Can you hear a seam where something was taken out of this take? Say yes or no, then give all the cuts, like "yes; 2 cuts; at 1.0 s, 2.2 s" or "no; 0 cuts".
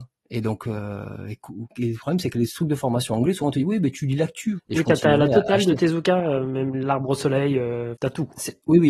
yes; 2 cuts; at 4.6 s, 7.9 s